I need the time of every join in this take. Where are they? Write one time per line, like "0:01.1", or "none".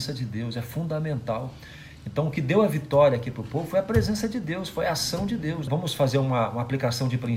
0:05.7